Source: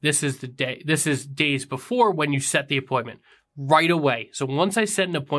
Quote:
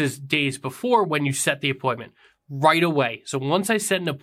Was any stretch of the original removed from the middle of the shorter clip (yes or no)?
no